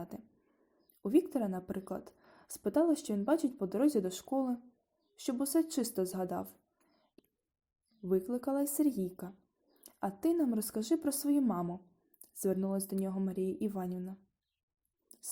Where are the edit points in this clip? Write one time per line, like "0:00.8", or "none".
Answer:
none